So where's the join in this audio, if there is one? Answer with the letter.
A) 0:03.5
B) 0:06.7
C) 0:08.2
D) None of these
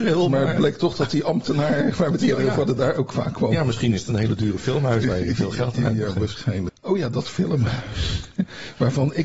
B